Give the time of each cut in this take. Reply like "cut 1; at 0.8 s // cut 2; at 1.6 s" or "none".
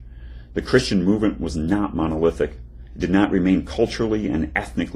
none